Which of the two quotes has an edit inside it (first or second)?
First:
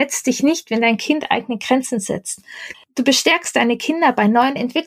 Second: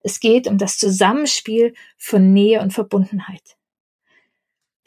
first